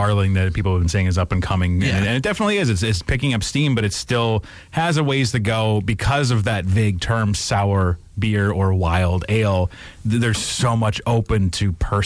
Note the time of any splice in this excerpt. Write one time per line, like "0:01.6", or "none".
none